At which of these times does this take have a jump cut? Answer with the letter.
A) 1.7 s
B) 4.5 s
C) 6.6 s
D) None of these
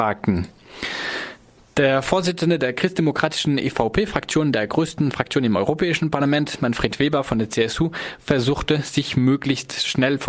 D